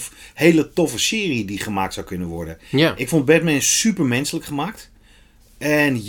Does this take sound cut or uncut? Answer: uncut